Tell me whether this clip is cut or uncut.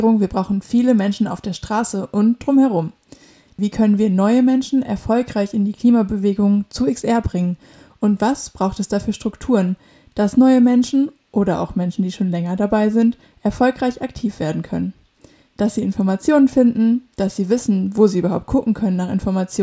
cut